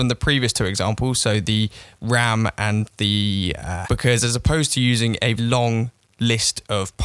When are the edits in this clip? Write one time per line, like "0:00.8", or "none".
0:03.8
0:05.4